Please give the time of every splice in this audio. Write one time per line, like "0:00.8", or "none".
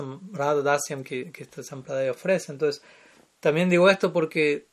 none